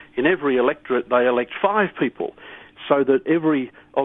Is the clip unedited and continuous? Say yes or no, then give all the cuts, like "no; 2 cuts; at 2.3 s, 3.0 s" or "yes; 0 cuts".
yes; 0 cuts